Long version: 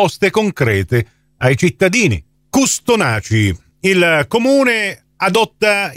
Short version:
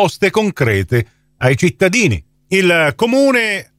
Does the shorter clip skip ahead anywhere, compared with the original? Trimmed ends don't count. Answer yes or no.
yes